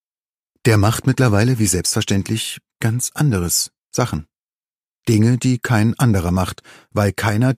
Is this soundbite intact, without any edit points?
no; 1 cut; at 3.8 s

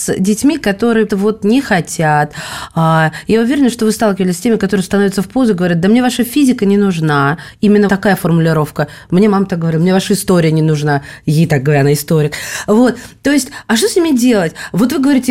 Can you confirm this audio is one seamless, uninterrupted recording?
no; 2 cuts; at 1.1 s, 7.9 s

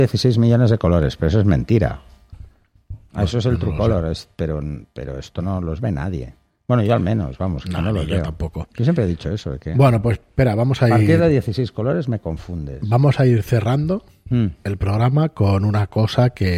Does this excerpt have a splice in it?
no; 0 cuts

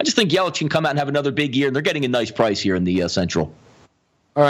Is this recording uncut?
yes; 0 cuts

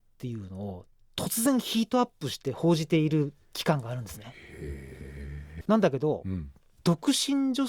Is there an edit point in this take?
yes; 1 cut; at 5.6 s

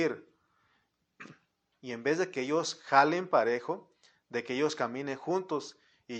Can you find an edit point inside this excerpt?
yes; 1 cut; at 1.7 s

